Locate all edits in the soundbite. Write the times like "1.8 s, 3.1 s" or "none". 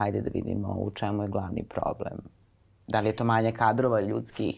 none